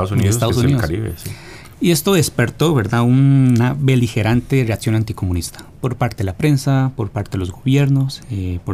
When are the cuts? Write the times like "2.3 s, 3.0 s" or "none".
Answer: 1.7 s